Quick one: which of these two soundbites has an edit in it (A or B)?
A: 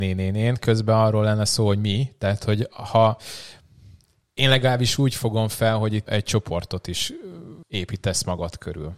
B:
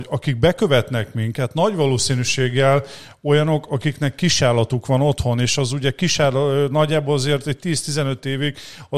A